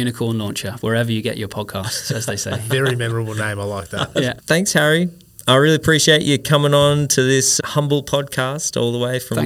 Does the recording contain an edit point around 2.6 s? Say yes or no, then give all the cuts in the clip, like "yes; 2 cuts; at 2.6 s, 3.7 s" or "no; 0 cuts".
no; 1 cut; at 4.4 s